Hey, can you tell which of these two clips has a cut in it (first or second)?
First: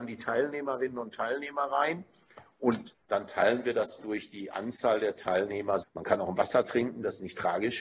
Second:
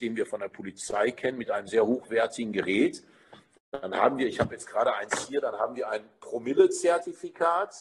first